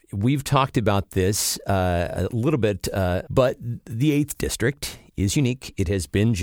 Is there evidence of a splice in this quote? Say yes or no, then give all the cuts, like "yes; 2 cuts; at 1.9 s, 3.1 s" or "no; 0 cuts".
yes; 1 cut; at 3.3 s